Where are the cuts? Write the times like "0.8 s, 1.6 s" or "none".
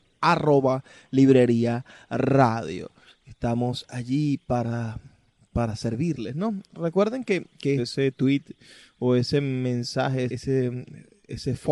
7.8 s, 10.3 s